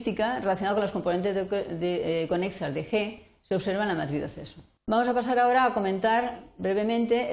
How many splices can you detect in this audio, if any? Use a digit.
1